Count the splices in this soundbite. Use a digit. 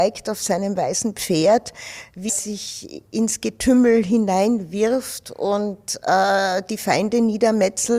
1